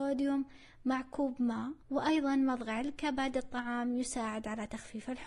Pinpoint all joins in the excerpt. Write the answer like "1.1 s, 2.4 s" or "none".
1.8 s